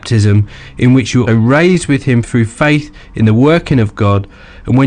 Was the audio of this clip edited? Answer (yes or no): yes